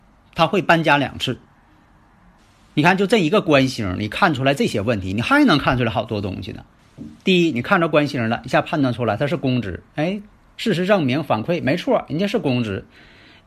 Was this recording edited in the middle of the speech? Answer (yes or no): no